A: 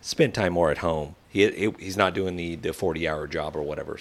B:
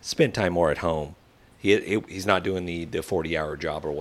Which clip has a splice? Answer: A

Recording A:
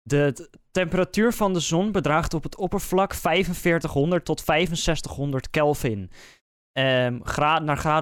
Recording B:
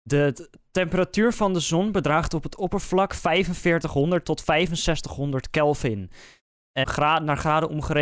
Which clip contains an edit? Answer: B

